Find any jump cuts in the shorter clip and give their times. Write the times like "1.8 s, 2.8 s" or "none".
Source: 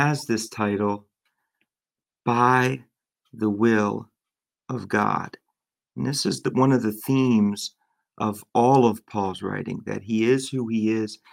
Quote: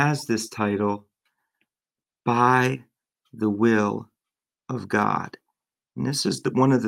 none